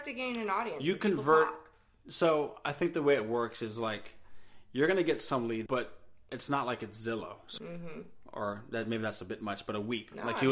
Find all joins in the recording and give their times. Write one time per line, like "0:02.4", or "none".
0:05.7
0:07.6